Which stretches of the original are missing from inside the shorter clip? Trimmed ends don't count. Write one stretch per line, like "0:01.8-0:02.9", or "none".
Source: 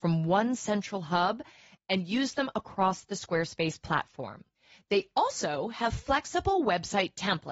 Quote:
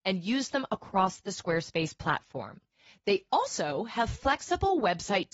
none